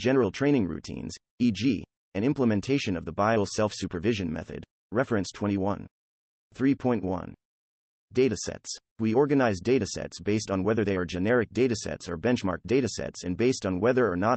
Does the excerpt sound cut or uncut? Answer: uncut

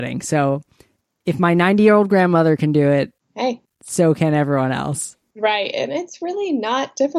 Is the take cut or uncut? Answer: uncut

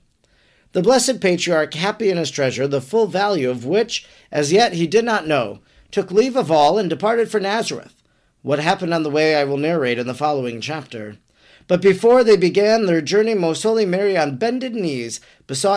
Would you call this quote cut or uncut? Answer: uncut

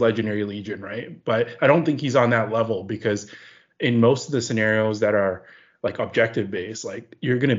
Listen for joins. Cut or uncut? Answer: uncut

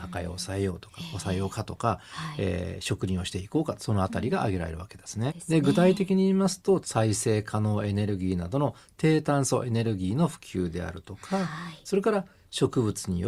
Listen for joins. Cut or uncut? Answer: cut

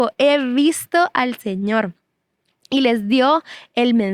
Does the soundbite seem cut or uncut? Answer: uncut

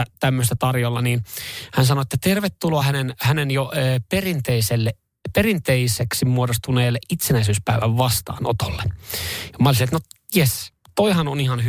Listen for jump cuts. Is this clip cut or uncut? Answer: uncut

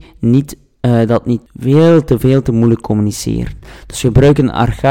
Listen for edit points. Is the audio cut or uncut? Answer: cut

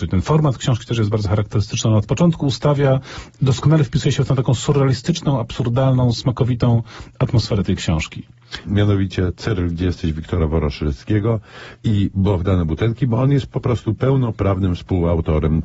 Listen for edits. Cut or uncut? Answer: cut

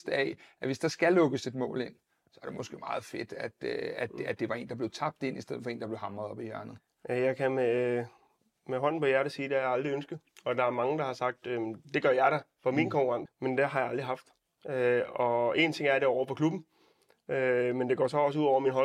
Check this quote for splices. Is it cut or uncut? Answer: cut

